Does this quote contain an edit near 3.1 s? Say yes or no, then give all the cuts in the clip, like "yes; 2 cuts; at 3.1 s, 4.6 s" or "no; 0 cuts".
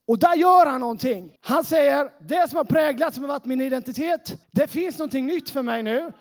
no; 2 cuts; at 1.4 s, 4.4 s